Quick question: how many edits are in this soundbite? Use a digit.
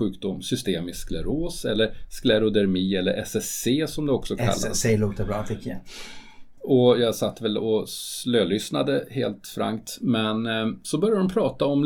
1